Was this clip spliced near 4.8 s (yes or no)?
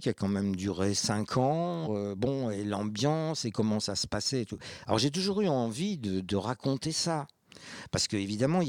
no